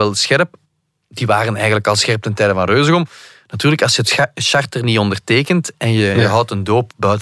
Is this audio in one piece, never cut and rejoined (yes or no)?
yes